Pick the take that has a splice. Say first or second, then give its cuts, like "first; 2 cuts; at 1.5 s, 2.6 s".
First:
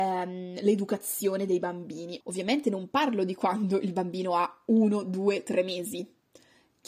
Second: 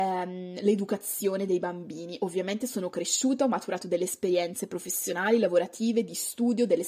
first; 1 cut; at 2.2 s